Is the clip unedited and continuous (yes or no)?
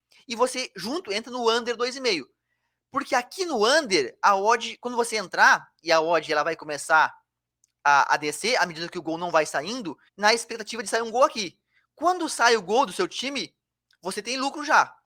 no